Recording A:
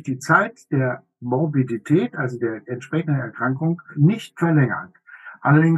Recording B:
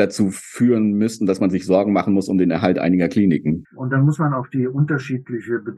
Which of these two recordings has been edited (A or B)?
B